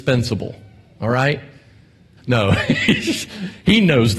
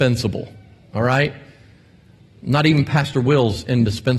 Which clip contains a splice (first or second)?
first